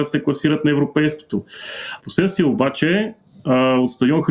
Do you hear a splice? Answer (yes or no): yes